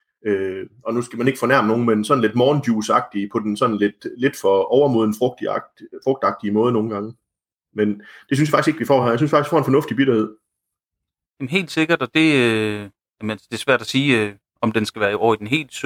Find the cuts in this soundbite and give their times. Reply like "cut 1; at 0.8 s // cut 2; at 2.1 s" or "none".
none